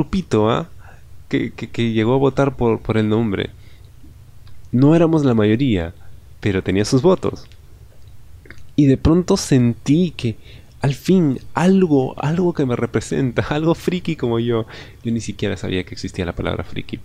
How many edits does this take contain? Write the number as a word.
one